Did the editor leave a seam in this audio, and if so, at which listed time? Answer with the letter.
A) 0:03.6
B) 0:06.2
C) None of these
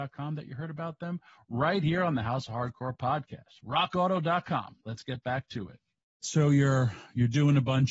B